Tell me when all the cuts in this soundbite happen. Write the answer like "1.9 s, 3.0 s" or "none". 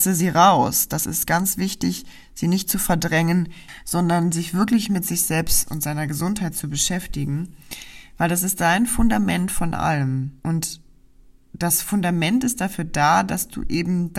10.4 s